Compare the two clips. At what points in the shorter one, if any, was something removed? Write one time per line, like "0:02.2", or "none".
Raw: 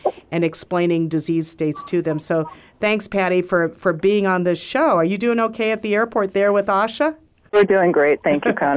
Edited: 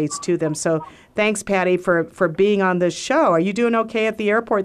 none